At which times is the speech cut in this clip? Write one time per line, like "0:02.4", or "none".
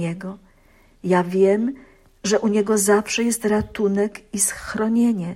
0:00.9